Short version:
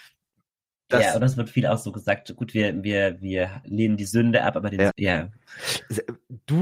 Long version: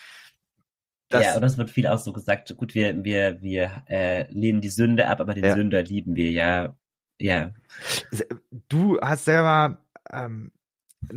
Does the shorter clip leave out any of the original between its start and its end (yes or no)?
yes